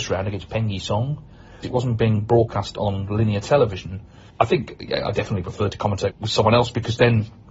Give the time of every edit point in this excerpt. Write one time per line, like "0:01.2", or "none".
0:01.6
0:04.3
0:06.1